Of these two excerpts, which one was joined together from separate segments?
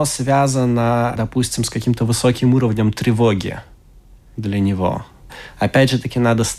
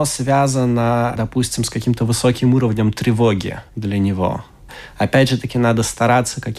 second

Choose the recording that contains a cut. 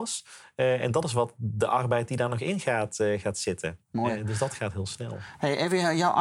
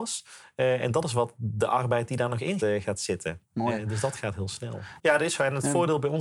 second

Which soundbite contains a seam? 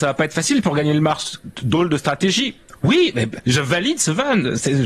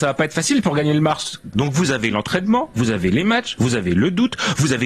second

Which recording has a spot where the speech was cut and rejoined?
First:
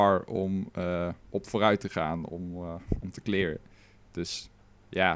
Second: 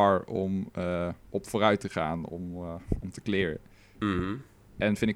second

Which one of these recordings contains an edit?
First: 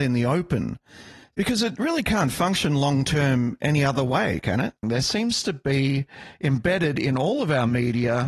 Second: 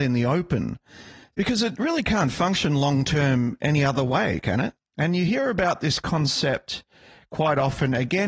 first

